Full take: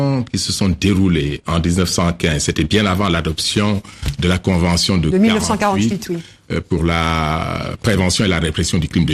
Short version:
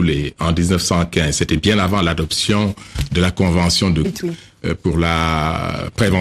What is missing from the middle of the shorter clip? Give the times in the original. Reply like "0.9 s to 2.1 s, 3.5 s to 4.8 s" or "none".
5.1 s to 5.9 s